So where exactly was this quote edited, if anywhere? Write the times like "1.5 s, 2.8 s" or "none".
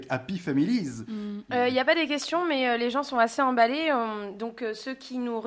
1.5 s